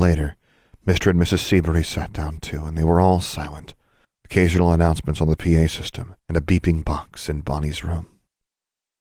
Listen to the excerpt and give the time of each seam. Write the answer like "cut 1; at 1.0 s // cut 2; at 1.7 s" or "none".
cut 1; at 4.0 s // cut 2; at 6.2 s